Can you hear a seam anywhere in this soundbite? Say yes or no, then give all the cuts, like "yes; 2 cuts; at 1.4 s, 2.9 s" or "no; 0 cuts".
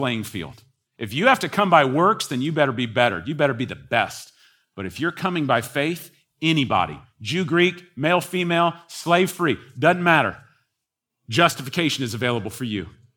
no; 0 cuts